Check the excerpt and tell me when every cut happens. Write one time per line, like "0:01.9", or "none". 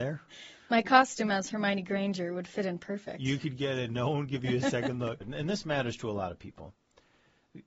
0:05.2